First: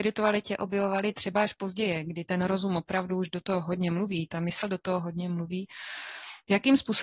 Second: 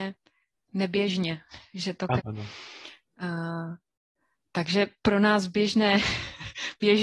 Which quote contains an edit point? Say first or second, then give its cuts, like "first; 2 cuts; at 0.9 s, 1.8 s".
second; 1 cut; at 2.2 s